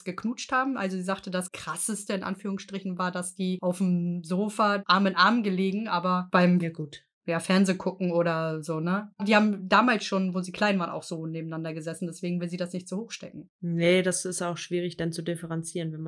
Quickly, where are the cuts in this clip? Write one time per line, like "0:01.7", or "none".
none